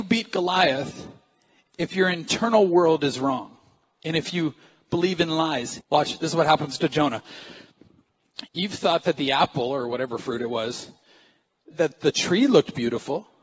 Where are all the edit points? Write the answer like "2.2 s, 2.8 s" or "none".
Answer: 5.8 s, 8.5 s, 11.7 s